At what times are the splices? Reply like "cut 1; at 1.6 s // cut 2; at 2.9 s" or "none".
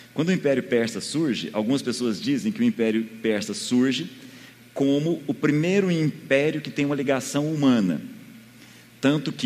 none